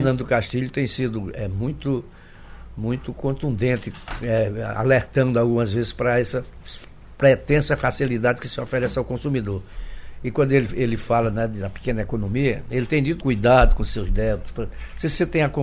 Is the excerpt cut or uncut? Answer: cut